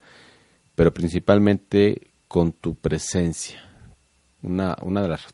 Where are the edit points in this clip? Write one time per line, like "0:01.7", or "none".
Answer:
0:04.4